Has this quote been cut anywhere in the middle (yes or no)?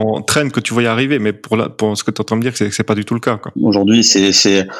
yes